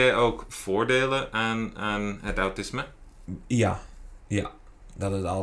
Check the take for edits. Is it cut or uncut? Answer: uncut